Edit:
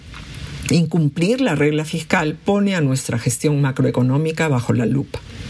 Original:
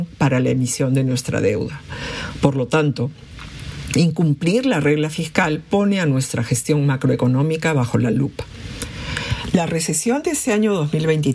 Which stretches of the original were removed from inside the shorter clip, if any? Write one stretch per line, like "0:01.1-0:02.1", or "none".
none